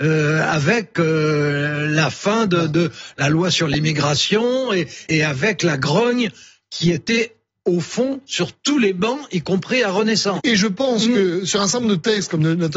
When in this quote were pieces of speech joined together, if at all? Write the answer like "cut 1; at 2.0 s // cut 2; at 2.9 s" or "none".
cut 1; at 5.1 s // cut 2; at 10.4 s

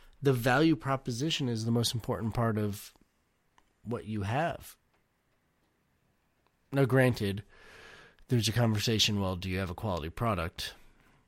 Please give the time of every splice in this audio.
none

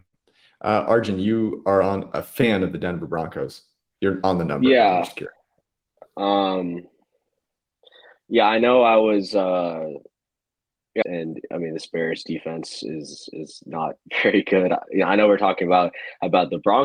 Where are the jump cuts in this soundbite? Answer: cut 1; at 3.9 s // cut 2; at 11.0 s

